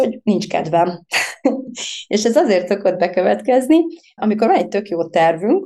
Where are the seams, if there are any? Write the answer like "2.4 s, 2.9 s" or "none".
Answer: 1.7 s, 4.2 s